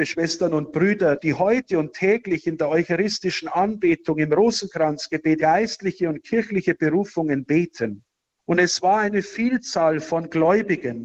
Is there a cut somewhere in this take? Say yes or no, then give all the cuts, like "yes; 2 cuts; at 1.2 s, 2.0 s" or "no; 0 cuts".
yes; 2 cuts; at 5.4 s, 8.4 s